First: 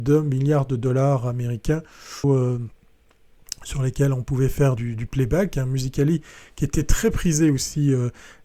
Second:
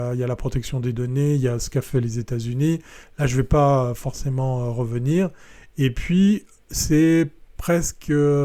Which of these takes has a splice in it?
first; 2 cuts; at 2.2 s, 4.8 s

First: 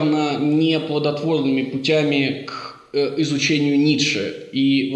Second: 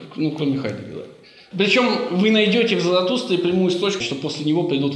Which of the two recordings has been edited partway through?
second; 1 cut; at 4.0 s

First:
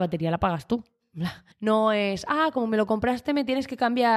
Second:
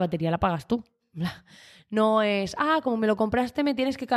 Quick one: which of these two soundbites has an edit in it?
first; 1 cut; at 1.5 s

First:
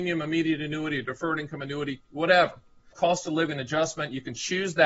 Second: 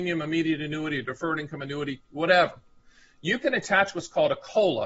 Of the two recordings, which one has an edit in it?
first; 1 cut; at 2.9 s

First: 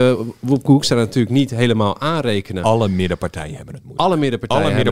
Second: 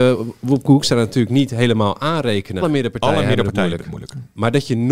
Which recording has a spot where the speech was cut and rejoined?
second; 1 cut; at 2.6 s

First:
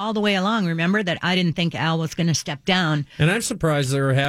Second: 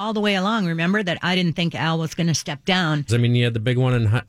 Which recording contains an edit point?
second; 1 cut; at 3.1 s

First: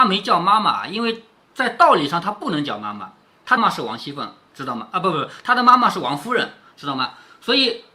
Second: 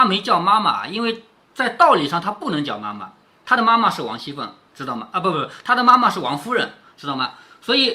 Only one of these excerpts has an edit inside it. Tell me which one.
first; 1 cut; at 3.6 s

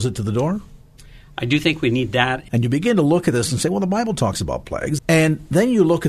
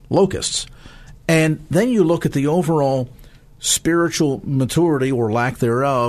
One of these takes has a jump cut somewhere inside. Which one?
first; 2 cuts; at 2.5 s, 5.0 s

